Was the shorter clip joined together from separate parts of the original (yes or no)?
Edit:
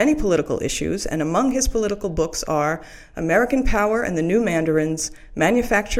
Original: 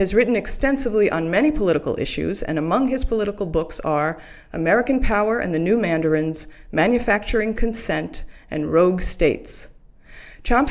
no